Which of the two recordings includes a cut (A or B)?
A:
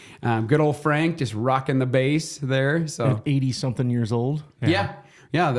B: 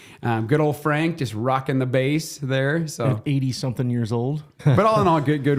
B